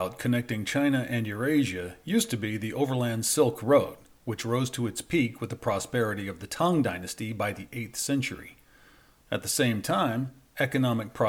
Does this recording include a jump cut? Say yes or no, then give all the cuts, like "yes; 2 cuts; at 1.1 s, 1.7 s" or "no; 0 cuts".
yes; 1 cut; at 9.2 s